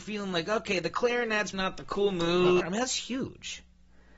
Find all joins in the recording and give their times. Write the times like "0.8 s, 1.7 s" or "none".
1.5 s, 2.6 s